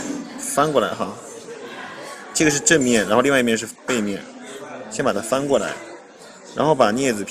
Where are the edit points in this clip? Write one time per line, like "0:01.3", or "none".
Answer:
none

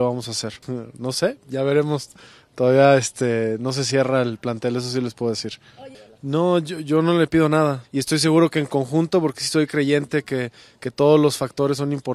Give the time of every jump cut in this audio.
0:07.8

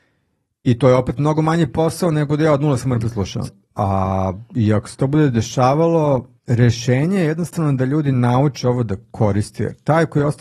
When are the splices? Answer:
0:03.5
0:06.4

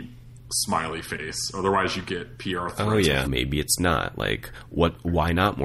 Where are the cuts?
0:03.2

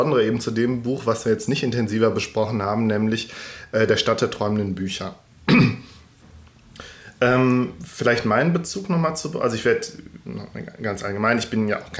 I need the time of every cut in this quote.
none

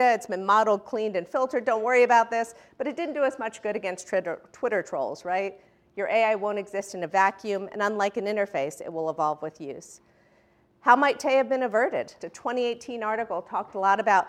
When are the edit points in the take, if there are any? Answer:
0:12.2

